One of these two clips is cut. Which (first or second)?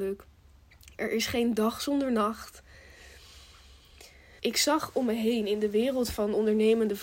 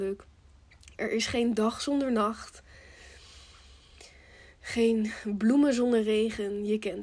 first